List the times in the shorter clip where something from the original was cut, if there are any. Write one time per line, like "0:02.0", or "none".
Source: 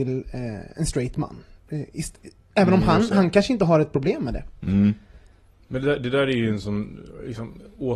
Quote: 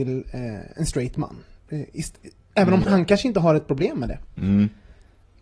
0:02.8